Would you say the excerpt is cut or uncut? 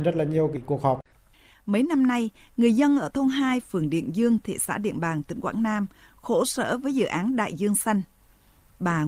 uncut